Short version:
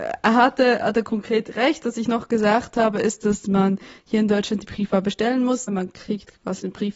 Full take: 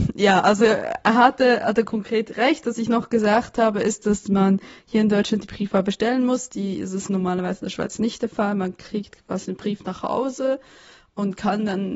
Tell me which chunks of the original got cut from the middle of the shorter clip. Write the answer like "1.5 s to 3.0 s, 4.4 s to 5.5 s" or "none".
6.5 s to 8.5 s